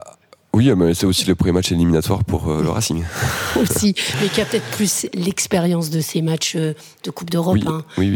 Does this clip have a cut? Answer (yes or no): no